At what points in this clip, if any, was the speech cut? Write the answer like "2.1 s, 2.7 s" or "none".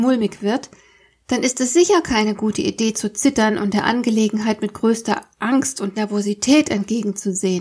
none